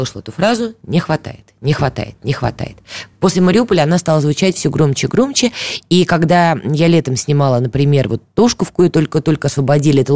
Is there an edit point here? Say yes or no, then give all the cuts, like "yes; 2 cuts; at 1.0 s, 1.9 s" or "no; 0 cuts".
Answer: no; 0 cuts